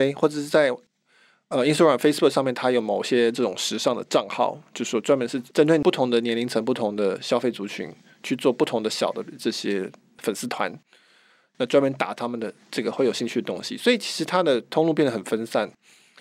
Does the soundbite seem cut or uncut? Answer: uncut